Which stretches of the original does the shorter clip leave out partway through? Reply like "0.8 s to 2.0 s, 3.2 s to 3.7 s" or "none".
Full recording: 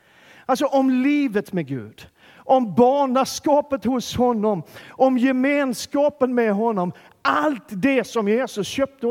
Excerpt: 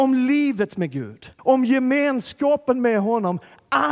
2.1 s to 4.9 s